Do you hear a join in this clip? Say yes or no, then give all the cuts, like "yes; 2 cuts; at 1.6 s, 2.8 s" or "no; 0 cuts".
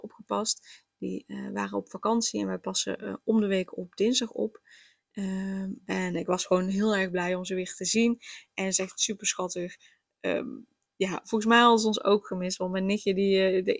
no; 0 cuts